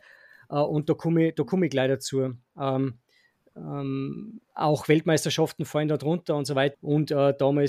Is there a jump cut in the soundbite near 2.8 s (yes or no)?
no